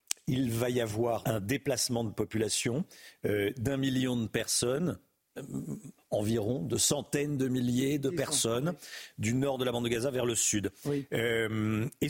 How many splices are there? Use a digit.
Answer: 1